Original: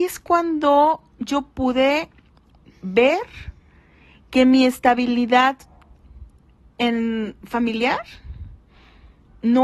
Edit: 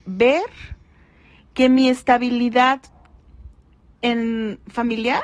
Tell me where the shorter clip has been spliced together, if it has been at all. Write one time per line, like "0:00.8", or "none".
none